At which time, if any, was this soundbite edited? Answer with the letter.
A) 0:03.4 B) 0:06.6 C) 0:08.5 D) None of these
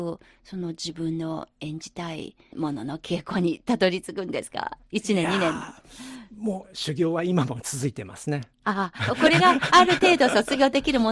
B